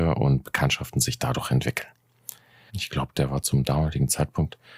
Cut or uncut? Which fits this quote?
cut